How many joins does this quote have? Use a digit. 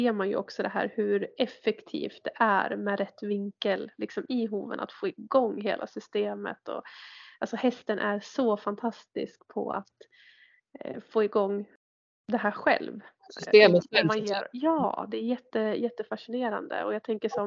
0